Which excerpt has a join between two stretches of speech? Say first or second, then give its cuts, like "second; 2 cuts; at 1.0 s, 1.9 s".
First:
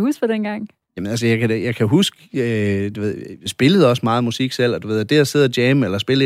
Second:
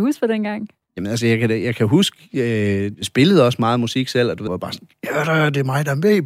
second; 2 cuts; at 2.9 s, 4.5 s